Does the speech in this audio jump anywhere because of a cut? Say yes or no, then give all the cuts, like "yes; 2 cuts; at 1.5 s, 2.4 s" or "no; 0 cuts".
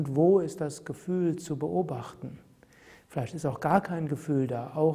no; 0 cuts